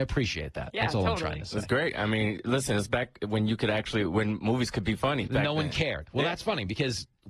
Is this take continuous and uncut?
no; 1 cut; at 5.3 s

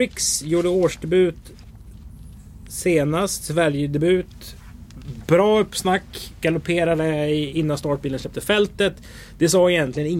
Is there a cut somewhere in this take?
no; 0 cuts

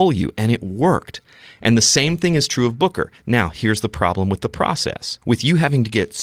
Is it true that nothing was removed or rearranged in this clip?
no; 1 cut; at 5.2 s

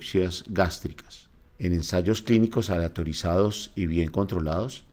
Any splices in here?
yes; 1 cut; at 1.5 s

